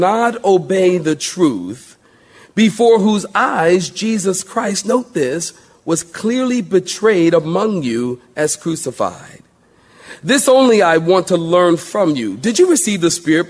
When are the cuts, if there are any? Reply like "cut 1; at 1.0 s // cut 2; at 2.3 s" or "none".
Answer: none

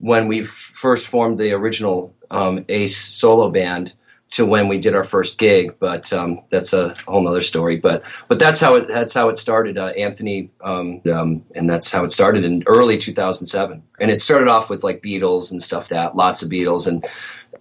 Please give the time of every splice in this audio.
cut 1; at 11.0 s // cut 2; at 14.0 s // cut 3; at 15.9 s

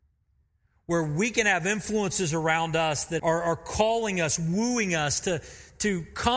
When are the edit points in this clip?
cut 1; at 3.2 s

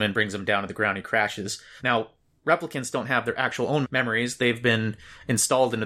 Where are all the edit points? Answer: cut 1; at 1.8 s // cut 2; at 3.8 s

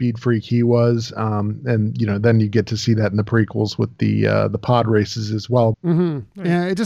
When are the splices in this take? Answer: cut 1; at 5.7 s

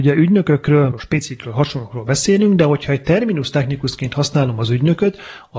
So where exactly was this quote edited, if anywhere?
cut 1; at 0.9 s

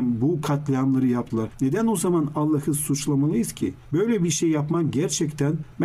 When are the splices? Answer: none

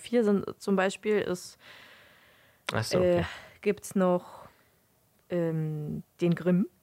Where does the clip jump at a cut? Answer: none

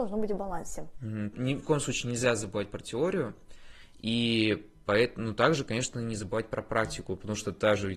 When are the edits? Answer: cut 1; at 1.3 s

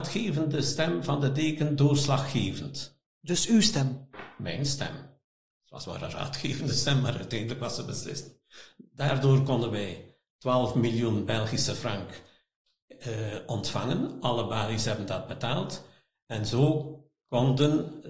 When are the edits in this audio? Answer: none

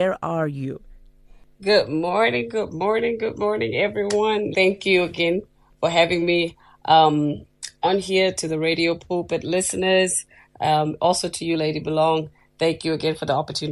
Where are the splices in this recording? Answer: cut 1; at 4.5 s

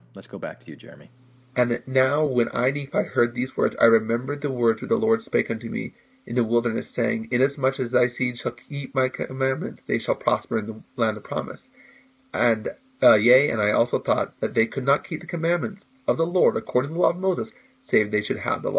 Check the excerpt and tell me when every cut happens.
none

